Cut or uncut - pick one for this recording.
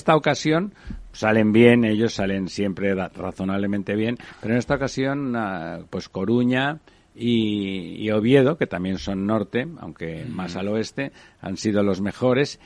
uncut